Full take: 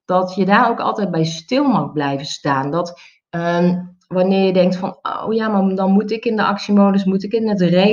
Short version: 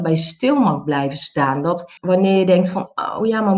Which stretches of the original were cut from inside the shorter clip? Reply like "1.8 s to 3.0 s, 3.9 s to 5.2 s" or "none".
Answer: 3.1 s to 4.0 s